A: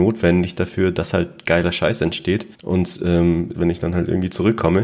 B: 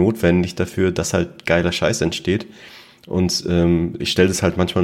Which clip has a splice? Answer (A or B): A